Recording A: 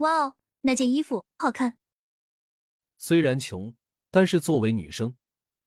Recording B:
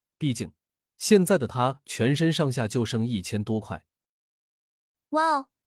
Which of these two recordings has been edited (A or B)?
A